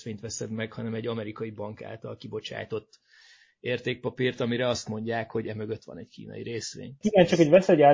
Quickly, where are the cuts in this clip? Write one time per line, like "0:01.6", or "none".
0:07.0